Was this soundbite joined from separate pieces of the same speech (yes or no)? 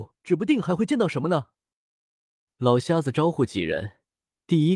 yes